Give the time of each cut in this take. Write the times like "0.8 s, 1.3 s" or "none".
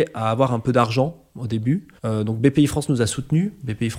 2.0 s